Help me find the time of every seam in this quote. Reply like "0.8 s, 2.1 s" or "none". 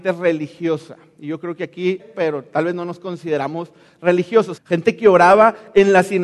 2.0 s, 4.6 s